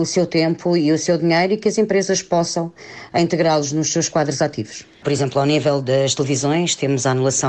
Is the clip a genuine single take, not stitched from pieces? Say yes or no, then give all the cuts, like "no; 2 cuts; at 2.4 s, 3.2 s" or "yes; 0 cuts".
no; 1 cut; at 5.0 s